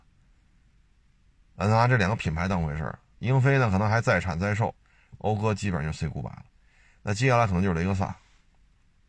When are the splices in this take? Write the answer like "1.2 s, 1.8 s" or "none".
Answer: none